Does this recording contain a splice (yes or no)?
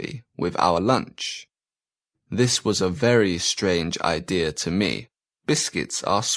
yes